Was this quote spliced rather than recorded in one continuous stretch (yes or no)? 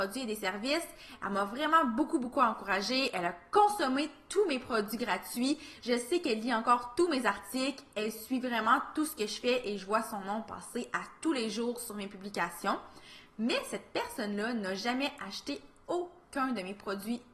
no